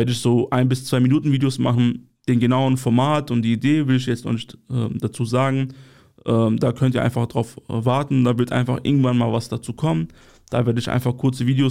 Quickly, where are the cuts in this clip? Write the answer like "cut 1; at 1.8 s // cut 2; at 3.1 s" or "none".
none

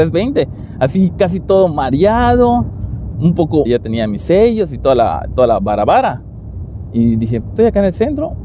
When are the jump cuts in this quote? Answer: cut 1; at 3.7 s // cut 2; at 7.4 s

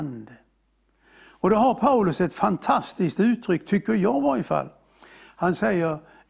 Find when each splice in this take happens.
none

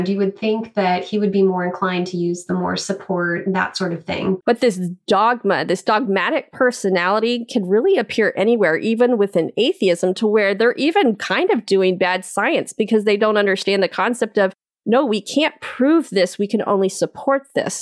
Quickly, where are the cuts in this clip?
cut 1; at 4.4 s

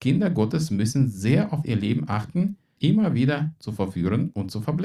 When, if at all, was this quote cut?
cut 1; at 2.8 s

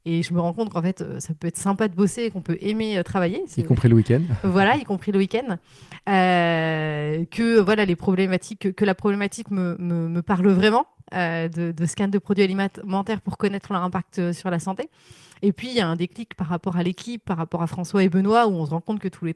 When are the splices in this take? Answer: none

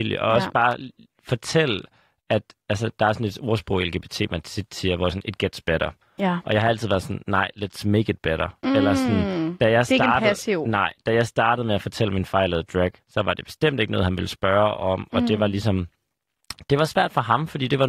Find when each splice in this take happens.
cut 1; at 13.0 s

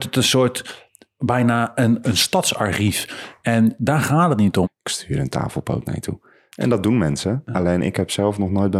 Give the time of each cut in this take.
cut 1; at 2.0 s // cut 2; at 4.6 s

